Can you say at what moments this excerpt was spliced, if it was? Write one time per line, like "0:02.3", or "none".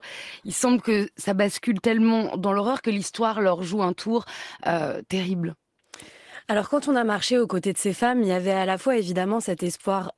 none